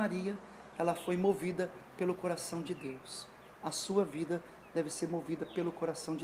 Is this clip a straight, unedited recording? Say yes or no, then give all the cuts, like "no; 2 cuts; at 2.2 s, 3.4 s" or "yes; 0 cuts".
yes; 0 cuts